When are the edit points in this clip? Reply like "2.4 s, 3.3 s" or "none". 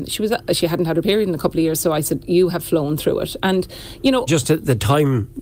4.3 s